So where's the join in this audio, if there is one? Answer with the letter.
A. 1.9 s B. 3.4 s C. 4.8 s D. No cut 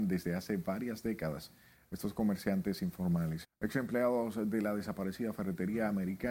B